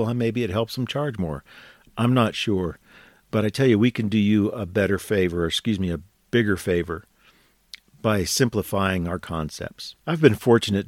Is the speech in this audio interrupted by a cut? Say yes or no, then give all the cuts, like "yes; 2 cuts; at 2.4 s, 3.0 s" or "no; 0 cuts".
no; 0 cuts